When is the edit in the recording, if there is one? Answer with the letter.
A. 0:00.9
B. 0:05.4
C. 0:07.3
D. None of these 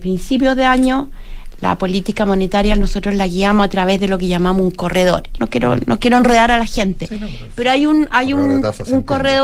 B